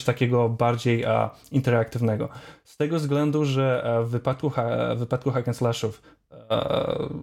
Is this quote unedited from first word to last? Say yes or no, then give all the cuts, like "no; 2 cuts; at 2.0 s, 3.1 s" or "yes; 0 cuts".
yes; 0 cuts